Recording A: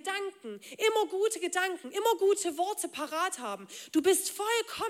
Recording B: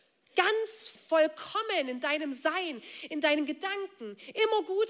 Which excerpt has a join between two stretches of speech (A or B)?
B